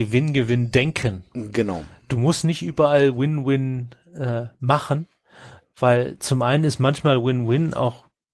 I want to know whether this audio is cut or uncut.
uncut